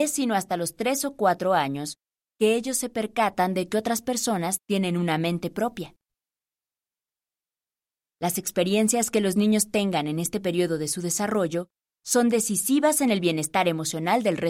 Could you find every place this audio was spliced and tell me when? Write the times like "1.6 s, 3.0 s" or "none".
none